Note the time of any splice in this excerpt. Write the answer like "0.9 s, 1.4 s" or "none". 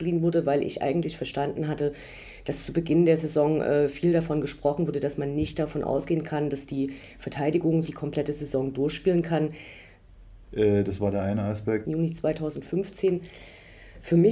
7.8 s, 10.4 s, 11.8 s